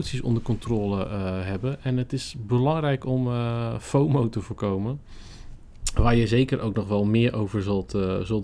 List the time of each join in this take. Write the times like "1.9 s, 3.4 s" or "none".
none